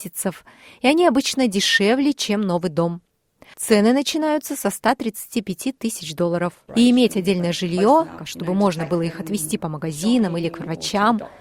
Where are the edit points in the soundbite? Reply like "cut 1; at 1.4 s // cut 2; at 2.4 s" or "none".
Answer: cut 1; at 6.7 s // cut 2; at 8.2 s

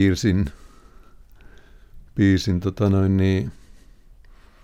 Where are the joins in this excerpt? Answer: none

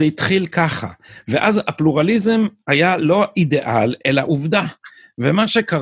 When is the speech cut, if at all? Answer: none

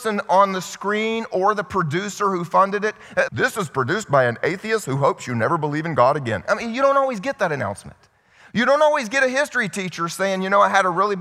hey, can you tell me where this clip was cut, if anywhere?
cut 1; at 3.3 s

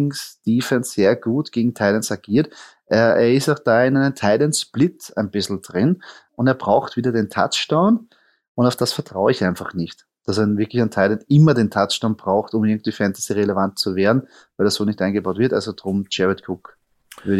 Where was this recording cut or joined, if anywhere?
cut 1; at 6.3 s

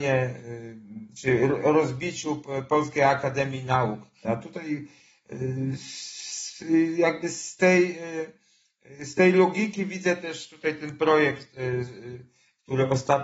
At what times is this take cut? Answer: cut 1; at 4.2 s

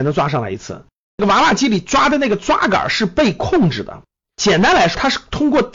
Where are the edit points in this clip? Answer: cut 1; at 1.1 s

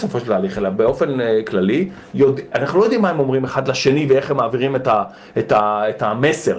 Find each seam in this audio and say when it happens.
none

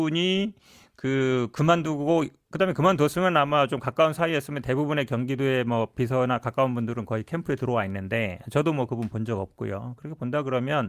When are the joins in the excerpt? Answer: none

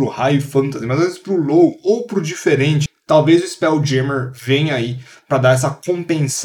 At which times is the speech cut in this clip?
none

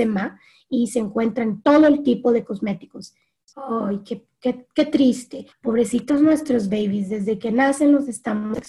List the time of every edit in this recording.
cut 1; at 3.4 s // cut 2; at 5.5 s

